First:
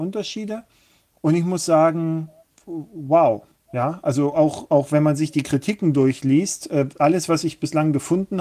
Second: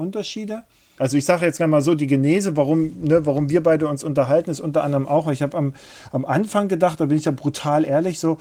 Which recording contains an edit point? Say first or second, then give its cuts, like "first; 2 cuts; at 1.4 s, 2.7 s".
second; 1 cut; at 1.0 s